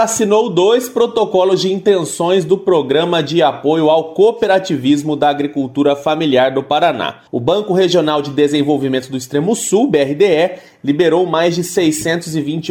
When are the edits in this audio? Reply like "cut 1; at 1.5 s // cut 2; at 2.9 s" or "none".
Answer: cut 1; at 7.3 s